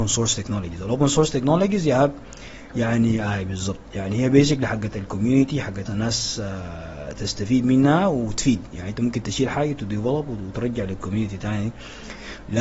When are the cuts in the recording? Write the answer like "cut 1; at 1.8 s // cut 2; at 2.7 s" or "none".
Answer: cut 1; at 5.9 s